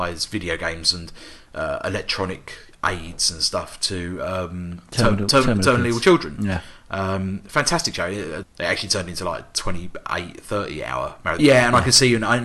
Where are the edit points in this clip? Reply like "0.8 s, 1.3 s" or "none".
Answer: 8.4 s, 11.4 s